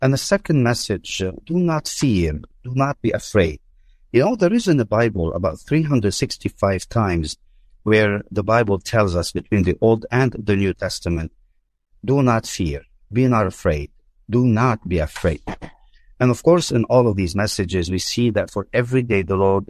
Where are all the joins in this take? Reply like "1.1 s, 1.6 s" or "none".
none